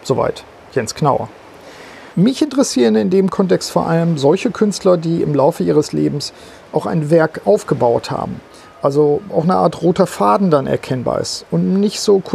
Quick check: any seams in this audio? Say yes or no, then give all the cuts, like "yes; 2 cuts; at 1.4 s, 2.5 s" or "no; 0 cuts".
yes; 1 cut; at 2.1 s